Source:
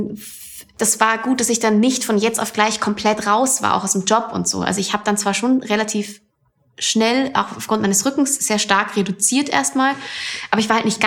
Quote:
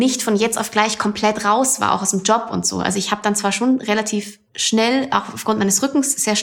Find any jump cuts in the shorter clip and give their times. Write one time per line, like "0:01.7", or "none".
0:04.5